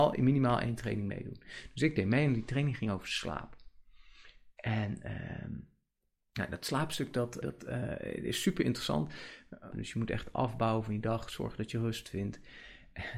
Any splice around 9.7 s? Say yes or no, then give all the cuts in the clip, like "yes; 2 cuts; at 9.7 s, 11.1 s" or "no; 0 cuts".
yes; 2 cuts; at 7.4 s, 9.7 s